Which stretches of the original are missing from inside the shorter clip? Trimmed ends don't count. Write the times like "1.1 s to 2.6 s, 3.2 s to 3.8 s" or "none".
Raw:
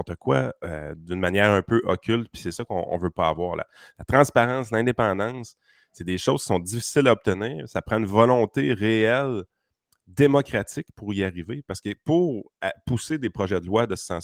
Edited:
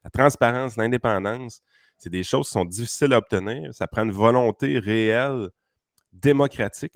none